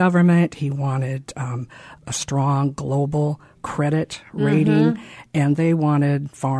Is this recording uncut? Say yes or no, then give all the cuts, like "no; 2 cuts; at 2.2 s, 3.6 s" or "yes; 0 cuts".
no; 1 cut; at 2.0 s